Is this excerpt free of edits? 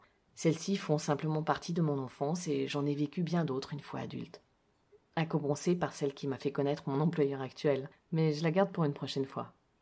yes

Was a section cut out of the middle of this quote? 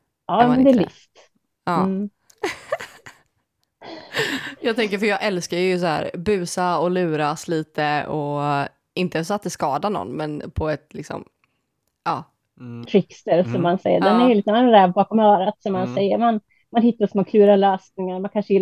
yes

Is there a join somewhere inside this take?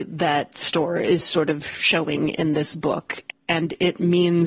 no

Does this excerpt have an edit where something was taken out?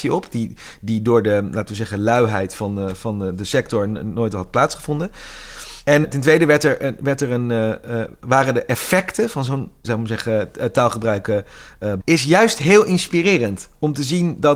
yes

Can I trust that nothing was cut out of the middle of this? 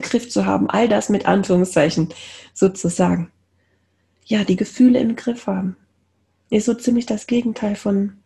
yes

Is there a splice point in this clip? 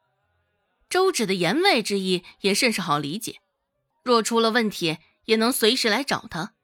yes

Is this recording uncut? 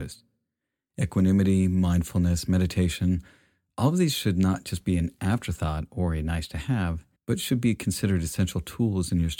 no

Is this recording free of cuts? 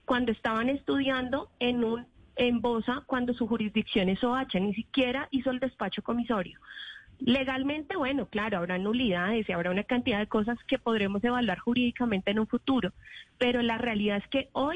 yes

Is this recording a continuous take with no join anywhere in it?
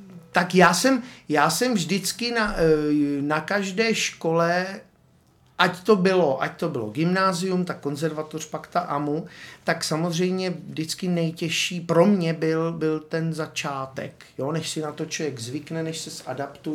yes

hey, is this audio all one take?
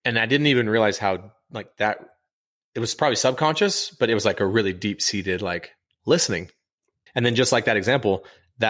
yes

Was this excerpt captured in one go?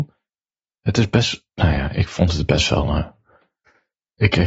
yes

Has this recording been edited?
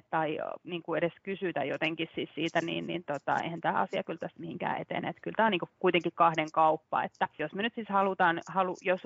no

